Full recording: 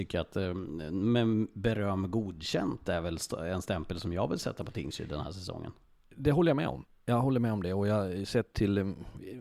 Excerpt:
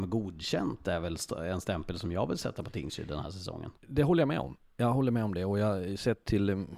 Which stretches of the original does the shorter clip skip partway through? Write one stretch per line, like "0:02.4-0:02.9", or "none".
0:05.8-0:06.1